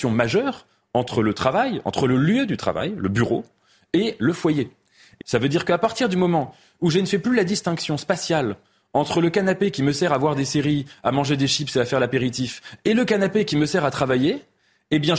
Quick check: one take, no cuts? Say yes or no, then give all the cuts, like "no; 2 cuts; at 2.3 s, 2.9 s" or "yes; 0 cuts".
no; 1 cut; at 5.2 s